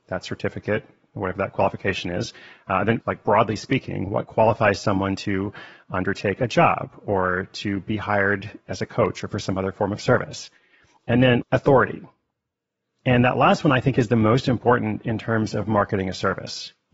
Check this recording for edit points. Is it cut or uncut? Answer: cut